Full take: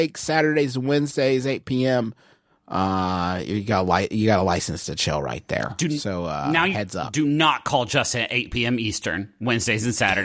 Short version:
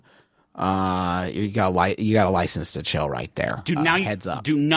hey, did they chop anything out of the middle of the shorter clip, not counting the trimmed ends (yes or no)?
yes